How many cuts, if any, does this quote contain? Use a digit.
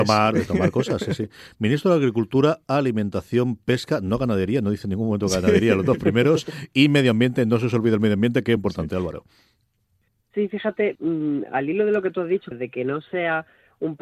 3